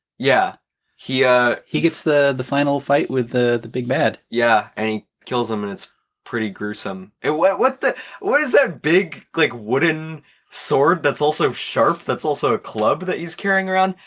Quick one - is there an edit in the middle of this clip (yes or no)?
no